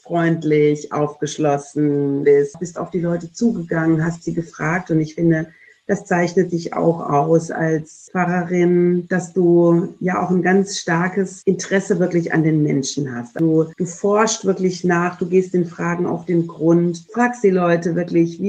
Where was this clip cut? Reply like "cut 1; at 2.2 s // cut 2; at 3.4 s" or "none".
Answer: none